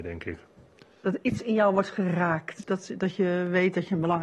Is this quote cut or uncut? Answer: cut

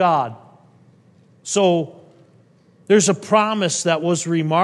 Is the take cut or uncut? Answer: uncut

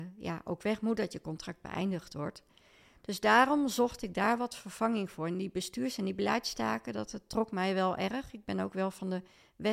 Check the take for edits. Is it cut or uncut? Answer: uncut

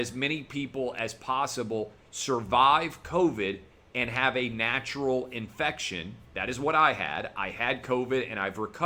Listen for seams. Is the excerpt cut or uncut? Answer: uncut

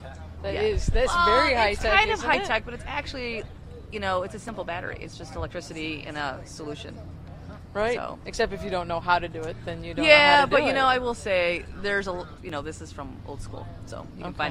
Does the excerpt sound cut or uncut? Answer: cut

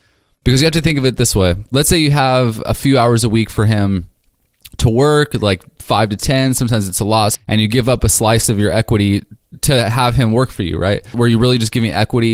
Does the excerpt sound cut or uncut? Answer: cut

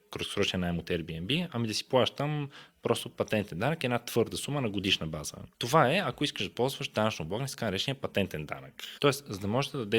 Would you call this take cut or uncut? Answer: cut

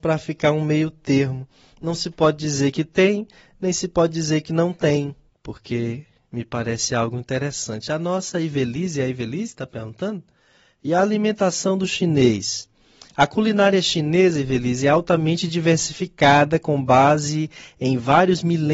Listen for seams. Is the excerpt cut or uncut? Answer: cut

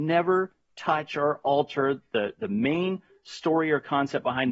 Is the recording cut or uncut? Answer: uncut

